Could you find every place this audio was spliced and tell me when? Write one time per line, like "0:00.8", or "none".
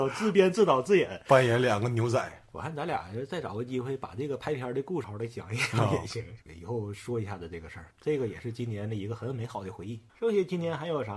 0:05.0
0:07.9